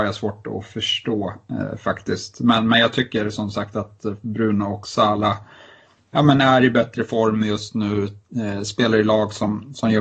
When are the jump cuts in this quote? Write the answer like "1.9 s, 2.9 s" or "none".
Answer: none